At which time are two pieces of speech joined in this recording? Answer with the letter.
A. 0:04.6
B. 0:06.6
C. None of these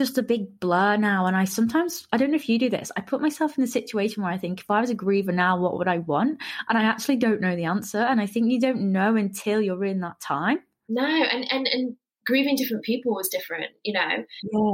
C